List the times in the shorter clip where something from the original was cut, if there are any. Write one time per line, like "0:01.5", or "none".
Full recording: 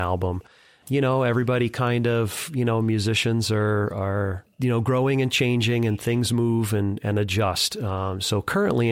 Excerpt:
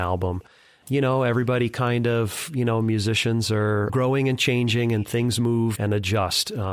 0:03.9
0:05.8